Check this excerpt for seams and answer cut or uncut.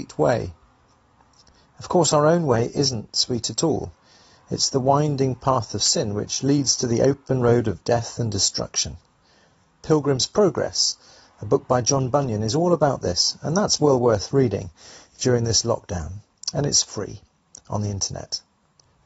uncut